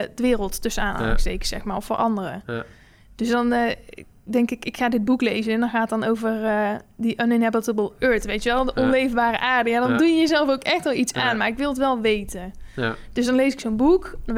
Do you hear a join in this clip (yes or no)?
no